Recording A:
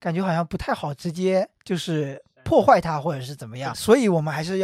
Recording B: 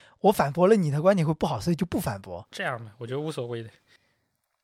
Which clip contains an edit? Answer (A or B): A